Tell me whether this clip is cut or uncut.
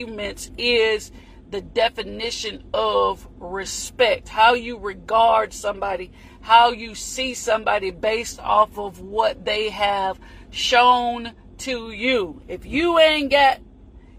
cut